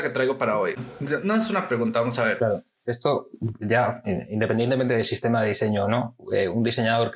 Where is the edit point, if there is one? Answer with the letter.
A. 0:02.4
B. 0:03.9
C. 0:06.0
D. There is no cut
A